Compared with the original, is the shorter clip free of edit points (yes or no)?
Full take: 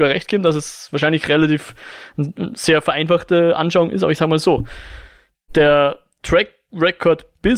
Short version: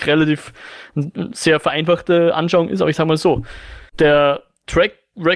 no